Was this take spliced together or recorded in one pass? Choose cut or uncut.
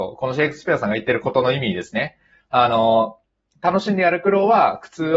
uncut